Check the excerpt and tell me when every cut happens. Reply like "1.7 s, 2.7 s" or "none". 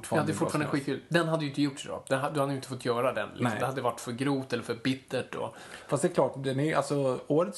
none